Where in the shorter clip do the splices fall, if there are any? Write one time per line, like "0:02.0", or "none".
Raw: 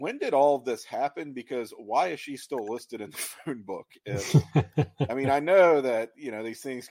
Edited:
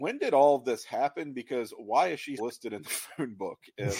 0:02.4